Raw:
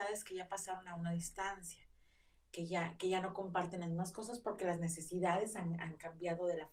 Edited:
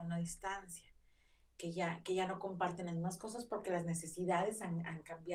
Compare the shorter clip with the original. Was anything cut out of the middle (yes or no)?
no